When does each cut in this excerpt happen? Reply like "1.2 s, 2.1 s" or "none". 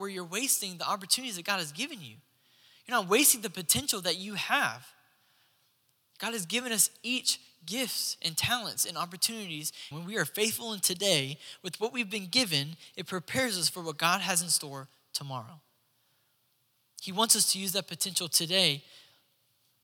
9.9 s